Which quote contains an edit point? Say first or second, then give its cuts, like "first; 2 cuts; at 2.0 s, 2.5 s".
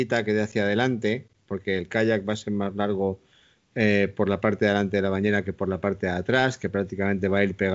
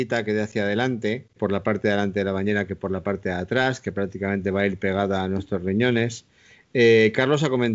second; 1 cut; at 1.4 s